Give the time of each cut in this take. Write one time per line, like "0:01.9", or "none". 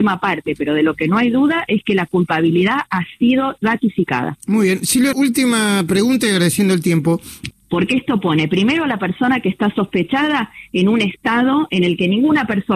0:05.1
0:07.5